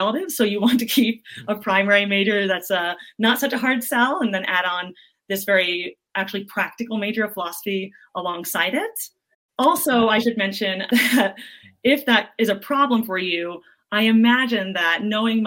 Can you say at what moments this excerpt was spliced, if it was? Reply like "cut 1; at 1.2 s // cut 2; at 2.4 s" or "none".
cut 1; at 10.9 s

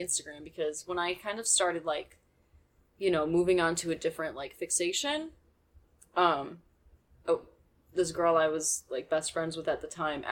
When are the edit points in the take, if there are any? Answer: none

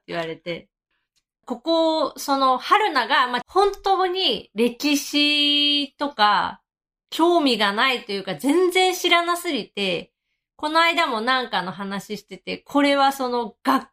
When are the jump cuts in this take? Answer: cut 1; at 1.4 s // cut 2; at 3.4 s

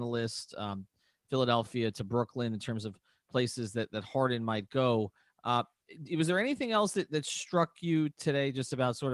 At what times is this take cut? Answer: none

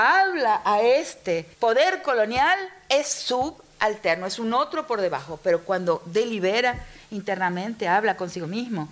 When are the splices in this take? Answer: cut 1; at 1.5 s

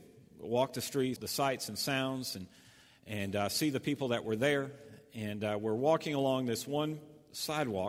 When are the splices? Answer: cut 1; at 1.2 s

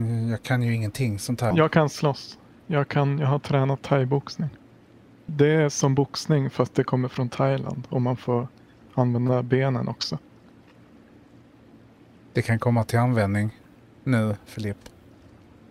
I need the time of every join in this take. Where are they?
cut 1; at 1.5 s // cut 2; at 5.3 s

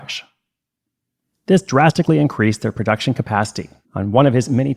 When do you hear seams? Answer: cut 1; at 3.8 s

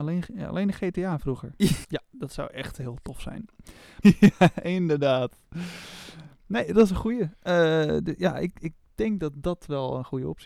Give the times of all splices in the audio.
cut 1; at 1.8 s // cut 2; at 4.0 s

